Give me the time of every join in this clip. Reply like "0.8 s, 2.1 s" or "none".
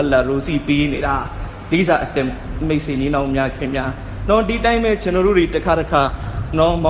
none

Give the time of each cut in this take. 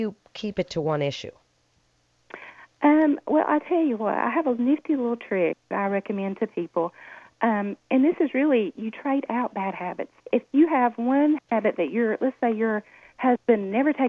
10.2 s

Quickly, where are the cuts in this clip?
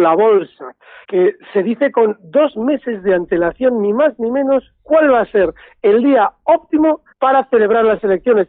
1.0 s, 7.1 s

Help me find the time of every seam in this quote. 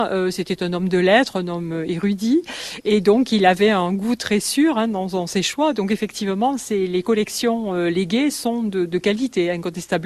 none

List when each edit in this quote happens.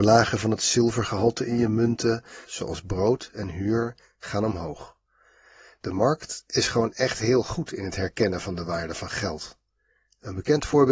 2.5 s

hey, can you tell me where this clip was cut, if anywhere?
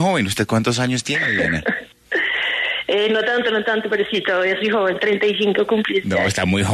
none

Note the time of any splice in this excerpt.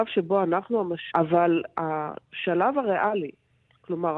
1.1 s

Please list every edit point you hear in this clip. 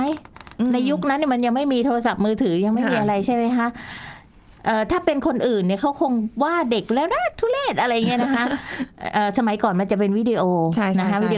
none

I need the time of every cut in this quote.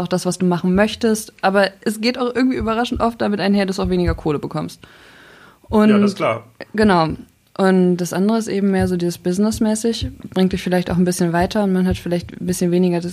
none

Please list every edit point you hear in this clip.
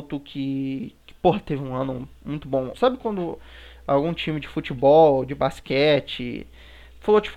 2.7 s

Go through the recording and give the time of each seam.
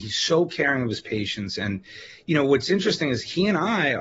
none

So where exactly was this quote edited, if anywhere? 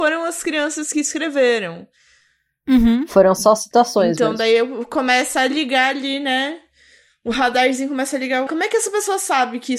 8.5 s

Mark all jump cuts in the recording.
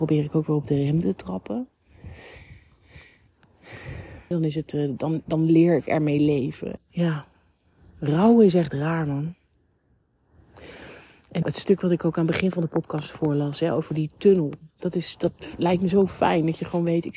4.3 s, 6.8 s, 11.4 s

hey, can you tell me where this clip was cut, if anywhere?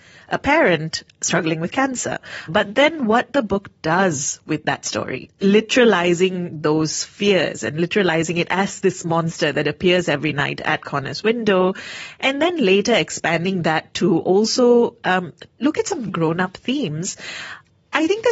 2.5 s, 16.1 s

